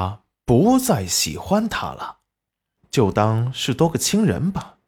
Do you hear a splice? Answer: yes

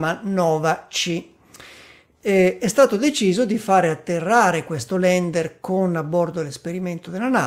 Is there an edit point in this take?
no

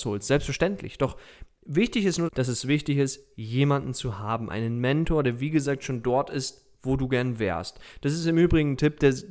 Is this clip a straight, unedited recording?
no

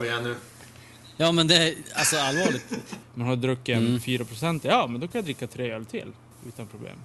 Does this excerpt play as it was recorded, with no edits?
no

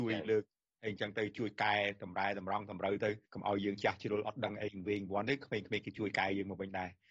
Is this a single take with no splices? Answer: no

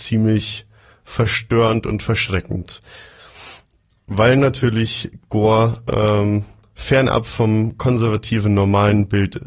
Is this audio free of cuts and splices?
yes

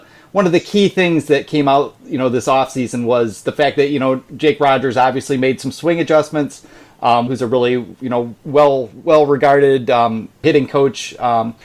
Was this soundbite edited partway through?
yes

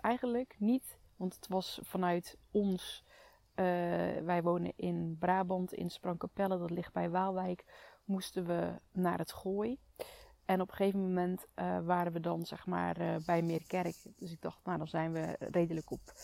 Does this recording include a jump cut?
no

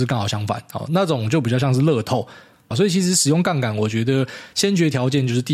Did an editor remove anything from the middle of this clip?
yes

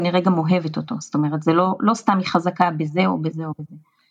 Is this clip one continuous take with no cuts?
yes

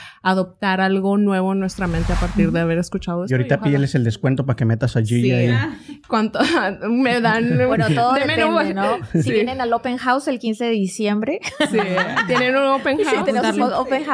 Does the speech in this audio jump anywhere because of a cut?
no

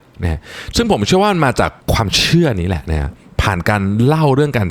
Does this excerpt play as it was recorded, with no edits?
no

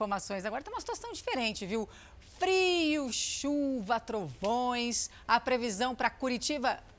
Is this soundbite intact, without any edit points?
yes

